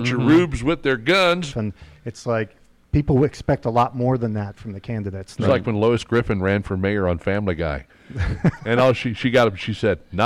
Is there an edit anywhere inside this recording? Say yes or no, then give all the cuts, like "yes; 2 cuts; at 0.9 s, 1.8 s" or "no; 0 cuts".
yes; 1 cut; at 1.5 s